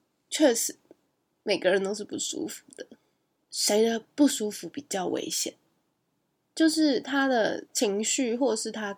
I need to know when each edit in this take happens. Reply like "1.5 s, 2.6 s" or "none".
3.5 s

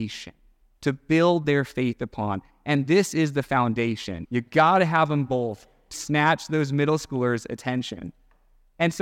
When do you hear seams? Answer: 4.3 s, 5.9 s

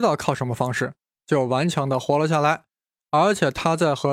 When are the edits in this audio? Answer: none

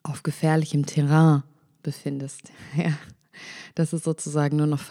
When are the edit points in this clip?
none

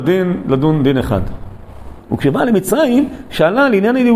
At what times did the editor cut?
2.0 s

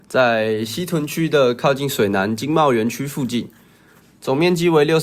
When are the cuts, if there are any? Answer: 4.0 s

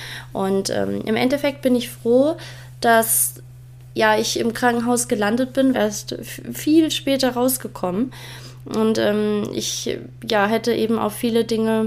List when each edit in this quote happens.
5.7 s

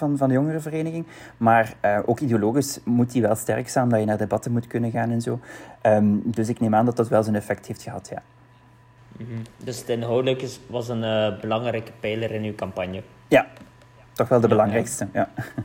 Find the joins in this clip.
none

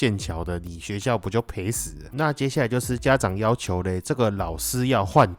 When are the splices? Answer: 2.1 s

